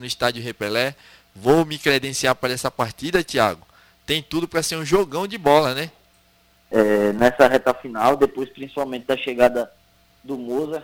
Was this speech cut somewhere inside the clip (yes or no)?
yes